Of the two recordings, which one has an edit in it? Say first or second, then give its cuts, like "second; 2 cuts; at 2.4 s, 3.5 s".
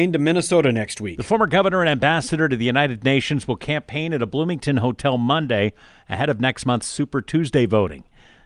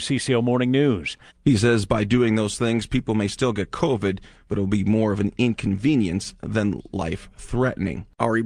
second; 1 cut; at 1.3 s